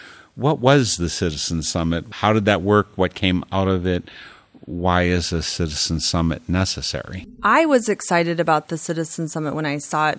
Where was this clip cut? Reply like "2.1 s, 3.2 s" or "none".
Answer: none